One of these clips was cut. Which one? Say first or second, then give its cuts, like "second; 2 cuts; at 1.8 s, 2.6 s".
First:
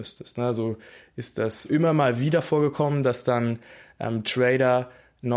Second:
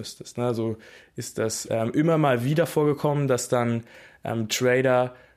first; 1 cut; at 1.7 s